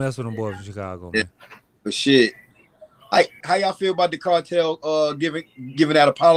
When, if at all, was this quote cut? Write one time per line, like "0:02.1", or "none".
0:03.4